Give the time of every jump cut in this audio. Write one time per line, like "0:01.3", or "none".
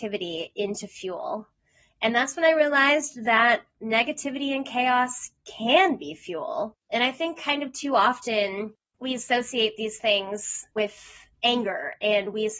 none